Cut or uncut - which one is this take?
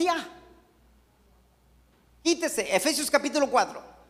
uncut